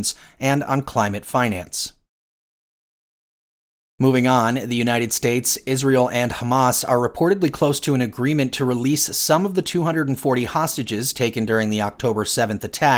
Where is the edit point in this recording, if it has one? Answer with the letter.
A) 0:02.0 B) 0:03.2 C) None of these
C